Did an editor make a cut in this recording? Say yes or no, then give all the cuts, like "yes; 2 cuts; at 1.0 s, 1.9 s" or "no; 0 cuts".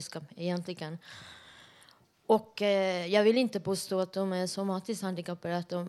no; 0 cuts